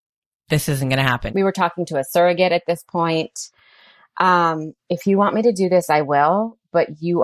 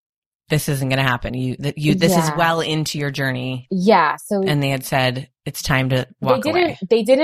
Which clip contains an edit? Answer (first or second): first